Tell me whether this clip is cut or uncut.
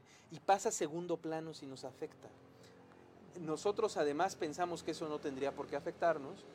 uncut